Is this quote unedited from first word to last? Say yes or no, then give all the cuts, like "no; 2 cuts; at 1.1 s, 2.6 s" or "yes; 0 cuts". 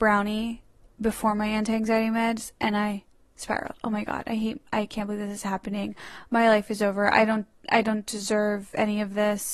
yes; 0 cuts